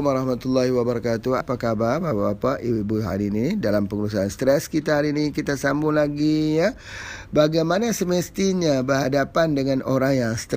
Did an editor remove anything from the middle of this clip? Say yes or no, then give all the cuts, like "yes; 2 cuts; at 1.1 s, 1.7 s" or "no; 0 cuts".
yes; 1 cut; at 1.4 s